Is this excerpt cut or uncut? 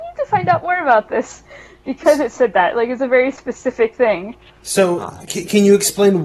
uncut